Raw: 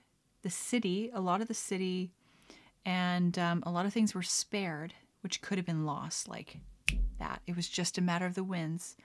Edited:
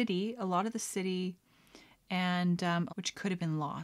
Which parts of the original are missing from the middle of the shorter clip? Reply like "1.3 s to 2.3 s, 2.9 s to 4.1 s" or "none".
3.6 s to 5.2 s